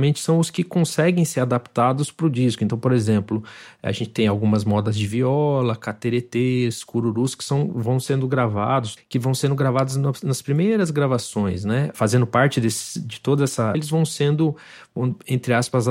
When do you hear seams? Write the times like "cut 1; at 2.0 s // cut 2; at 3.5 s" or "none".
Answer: cut 1; at 9.0 s // cut 2; at 11.9 s // cut 3; at 13.7 s

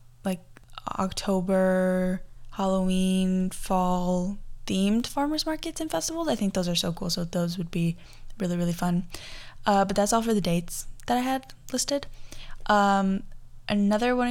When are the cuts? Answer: none

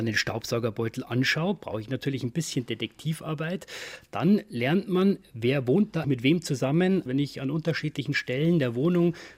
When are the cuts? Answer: cut 1; at 6.0 s // cut 2; at 7.1 s

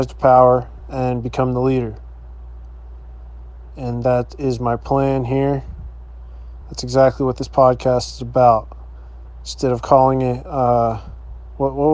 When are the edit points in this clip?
none

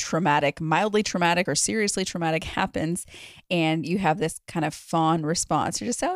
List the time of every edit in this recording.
none

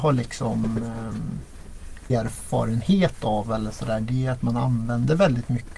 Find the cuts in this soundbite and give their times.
cut 1; at 2.1 s

